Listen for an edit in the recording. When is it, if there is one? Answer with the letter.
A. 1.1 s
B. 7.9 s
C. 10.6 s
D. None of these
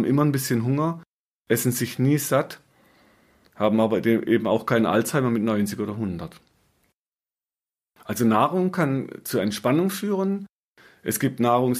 D